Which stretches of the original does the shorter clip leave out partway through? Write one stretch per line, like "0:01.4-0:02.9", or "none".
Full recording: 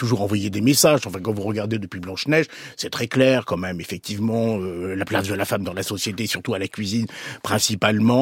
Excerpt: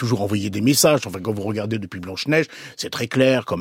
none